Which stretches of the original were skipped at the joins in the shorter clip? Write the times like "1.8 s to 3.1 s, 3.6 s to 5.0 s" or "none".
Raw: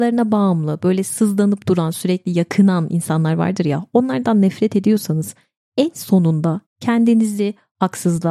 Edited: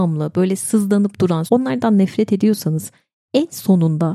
1.9 s to 3.9 s